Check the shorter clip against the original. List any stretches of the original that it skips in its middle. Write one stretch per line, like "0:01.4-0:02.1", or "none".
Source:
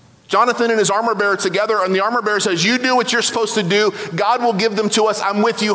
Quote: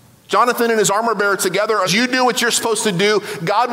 0:01.9-0:02.6